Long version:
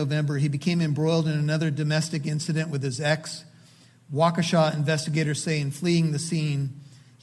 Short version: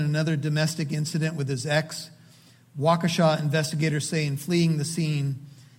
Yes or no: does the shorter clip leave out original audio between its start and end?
no